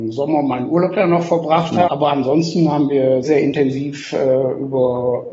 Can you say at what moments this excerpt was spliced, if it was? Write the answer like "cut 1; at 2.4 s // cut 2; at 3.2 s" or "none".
cut 1; at 1.9 s // cut 2; at 3.2 s